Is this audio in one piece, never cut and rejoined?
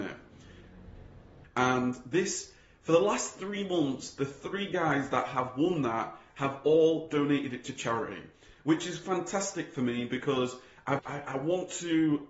no; 2 cuts; at 1.4 s, 11.0 s

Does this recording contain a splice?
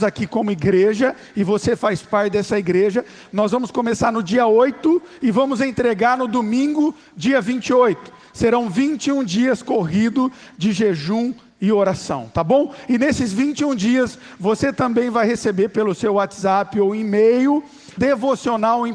yes; 1 cut; at 18.0 s

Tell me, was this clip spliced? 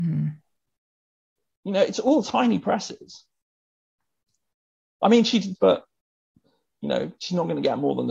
yes; 1 cut; at 5.5 s

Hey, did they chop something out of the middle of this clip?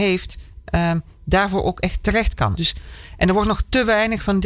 yes; 1 cut; at 2.6 s

